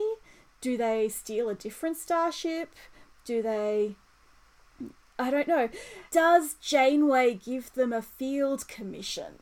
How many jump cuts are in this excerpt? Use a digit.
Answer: 1